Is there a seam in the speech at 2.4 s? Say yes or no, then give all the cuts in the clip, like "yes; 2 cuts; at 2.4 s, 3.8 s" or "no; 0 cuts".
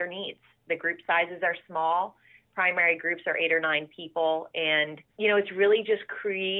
no; 1 cut; at 5.1 s